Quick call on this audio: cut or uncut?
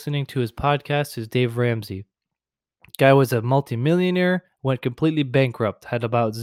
uncut